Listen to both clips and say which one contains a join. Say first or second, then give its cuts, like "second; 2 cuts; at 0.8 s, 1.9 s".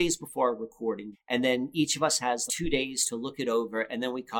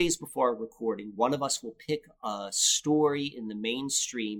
first; 2 cuts; at 1.1 s, 2.5 s